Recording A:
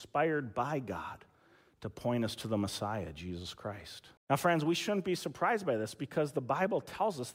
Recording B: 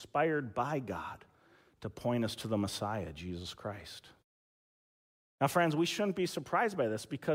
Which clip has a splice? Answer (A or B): A